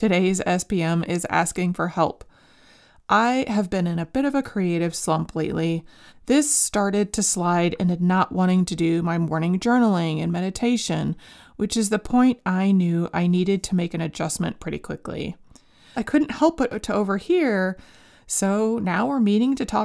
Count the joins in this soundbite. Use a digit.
2